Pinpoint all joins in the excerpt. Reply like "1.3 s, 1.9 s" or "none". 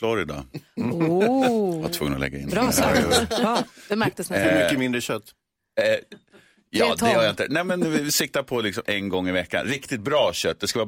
none